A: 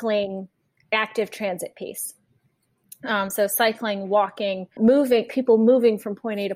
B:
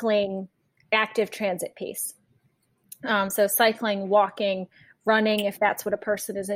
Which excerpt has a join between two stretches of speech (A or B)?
A